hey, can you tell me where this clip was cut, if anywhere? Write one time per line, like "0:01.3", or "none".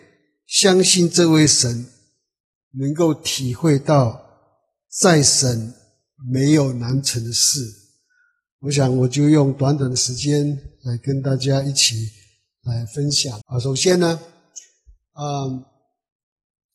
0:13.4

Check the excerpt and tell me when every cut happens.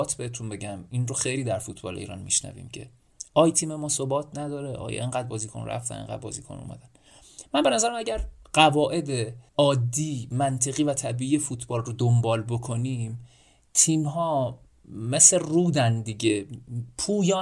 0:09.5

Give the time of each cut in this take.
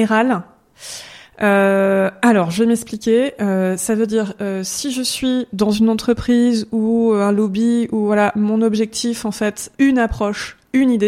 0:09.7

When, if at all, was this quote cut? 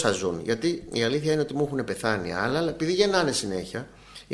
none

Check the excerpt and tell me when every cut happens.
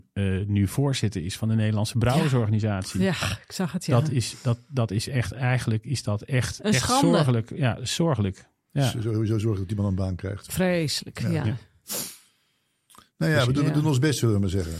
0:10.5

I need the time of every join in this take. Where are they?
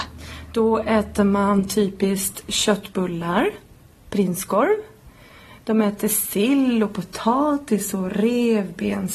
none

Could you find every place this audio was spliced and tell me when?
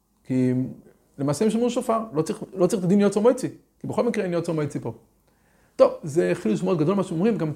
none

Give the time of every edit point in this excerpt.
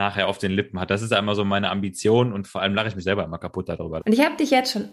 0:04.0

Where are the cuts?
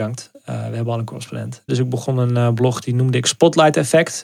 0:01.7

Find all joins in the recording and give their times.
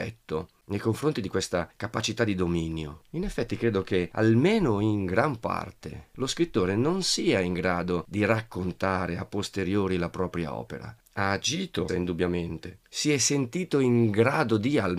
0:11.9

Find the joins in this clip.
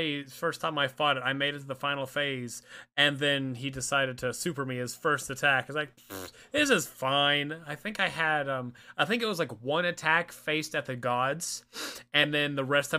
none

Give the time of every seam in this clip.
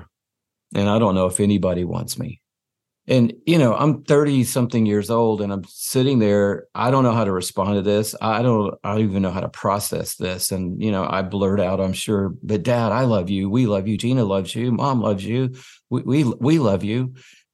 none

